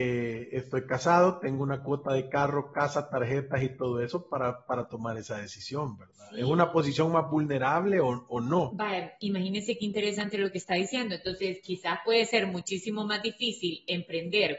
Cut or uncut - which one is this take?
uncut